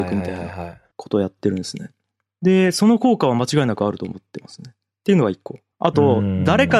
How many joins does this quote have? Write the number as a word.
one